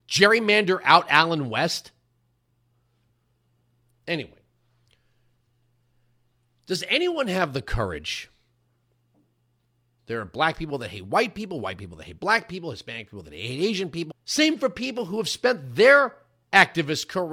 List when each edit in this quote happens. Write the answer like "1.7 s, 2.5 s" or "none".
10.0 s, 14.1 s